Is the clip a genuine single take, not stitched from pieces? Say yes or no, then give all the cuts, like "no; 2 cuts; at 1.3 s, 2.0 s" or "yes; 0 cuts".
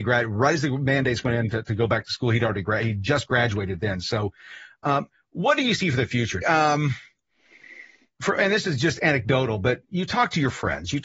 no; 1 cut; at 6.4 s